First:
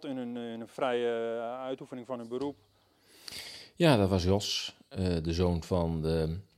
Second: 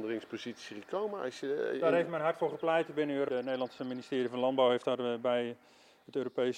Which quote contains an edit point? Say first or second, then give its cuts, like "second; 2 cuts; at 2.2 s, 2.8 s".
second; 1 cut; at 3.3 s